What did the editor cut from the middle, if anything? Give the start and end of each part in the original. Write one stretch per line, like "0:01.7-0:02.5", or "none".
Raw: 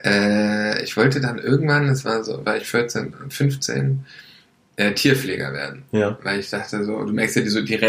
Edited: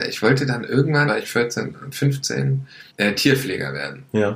0:01.8-0:02.4
0:04.3-0:04.7